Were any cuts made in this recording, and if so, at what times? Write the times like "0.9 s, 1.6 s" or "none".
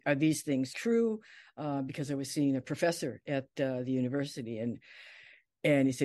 none